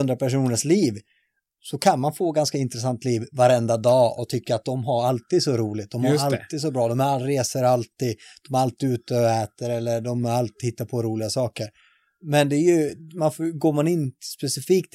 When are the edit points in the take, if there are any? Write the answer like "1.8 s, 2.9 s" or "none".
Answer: none